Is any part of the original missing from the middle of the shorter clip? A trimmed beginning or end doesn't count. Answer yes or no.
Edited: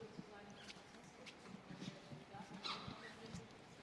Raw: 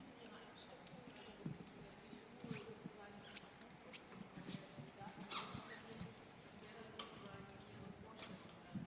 no